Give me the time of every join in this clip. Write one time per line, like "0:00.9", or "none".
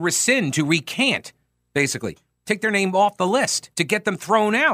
0:03.7